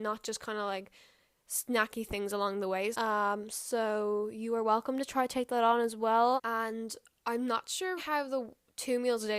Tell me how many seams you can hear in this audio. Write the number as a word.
three